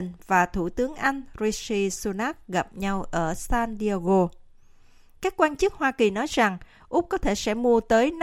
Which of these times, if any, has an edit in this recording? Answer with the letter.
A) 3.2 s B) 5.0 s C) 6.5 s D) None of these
D